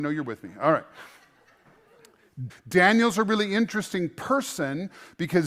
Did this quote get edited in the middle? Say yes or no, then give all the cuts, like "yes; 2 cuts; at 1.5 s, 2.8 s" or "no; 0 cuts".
yes; 1 cut; at 2.5 s